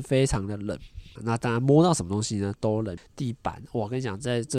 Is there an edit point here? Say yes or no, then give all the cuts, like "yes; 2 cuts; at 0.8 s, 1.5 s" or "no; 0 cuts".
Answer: yes; 2 cuts; at 1.2 s, 3.0 s